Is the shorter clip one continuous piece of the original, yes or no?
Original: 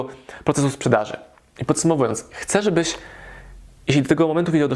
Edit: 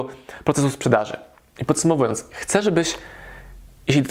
yes